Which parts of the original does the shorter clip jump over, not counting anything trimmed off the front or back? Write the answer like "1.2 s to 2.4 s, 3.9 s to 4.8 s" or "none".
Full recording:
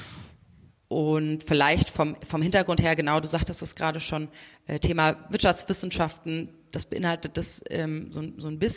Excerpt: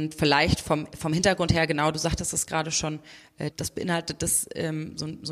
4.8 s to 6.7 s